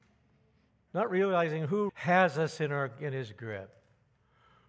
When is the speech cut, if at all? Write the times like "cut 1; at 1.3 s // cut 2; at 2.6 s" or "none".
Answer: cut 1; at 1.9 s